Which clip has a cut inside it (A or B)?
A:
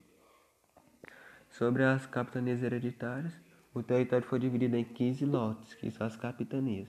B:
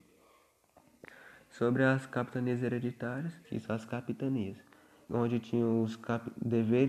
B